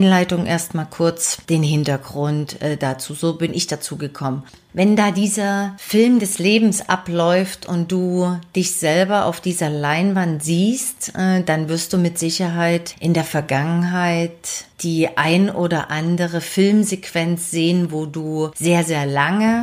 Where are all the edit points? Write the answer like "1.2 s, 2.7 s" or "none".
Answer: none